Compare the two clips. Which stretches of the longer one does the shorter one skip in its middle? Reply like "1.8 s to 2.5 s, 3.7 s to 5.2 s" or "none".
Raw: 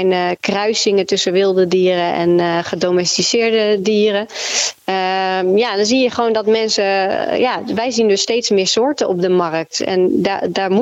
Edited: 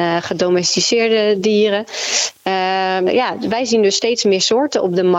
5.5 s to 7.3 s

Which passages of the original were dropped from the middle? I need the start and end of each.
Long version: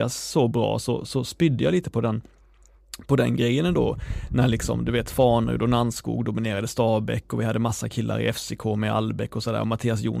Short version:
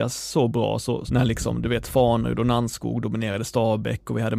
1.1 s to 4.3 s

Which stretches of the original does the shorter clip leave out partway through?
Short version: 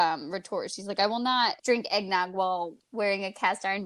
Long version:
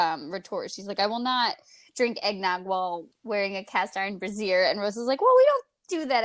1.6 s to 1.9 s

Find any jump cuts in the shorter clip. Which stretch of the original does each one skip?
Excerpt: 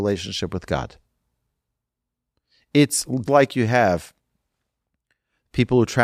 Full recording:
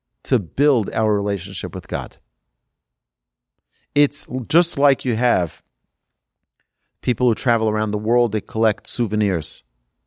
4.5 s to 4.7 s

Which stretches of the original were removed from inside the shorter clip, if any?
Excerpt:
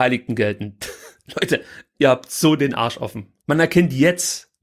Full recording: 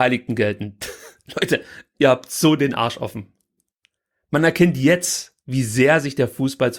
3.4 s to 4.2 s

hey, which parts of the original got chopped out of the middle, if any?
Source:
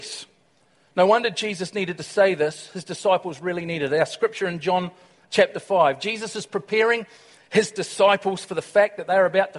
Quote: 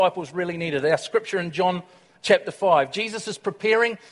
none

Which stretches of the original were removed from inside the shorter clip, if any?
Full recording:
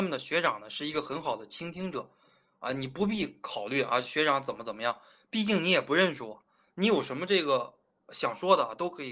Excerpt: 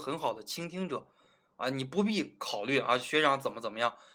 none

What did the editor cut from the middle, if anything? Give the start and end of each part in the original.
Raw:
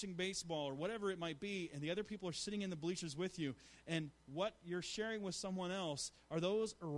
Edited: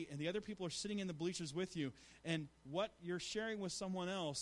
none

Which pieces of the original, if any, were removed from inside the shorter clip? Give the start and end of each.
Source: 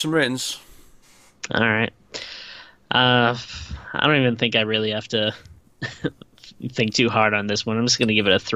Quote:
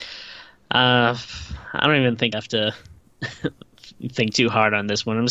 4.5 s to 4.9 s

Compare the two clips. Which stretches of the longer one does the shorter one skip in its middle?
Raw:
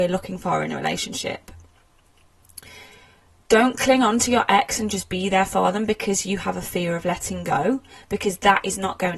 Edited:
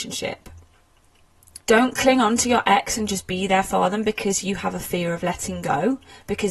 2.6 s to 3.4 s

